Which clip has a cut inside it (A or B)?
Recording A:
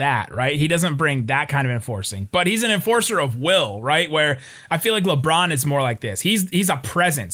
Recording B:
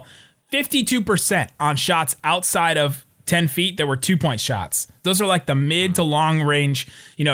B